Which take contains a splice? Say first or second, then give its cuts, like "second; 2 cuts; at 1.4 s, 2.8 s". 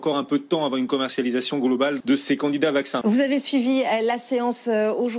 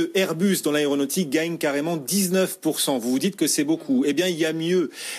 first; 2 cuts; at 2.0 s, 3.0 s